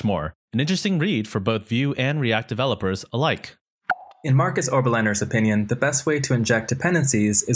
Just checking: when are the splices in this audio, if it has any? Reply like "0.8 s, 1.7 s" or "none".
4.1 s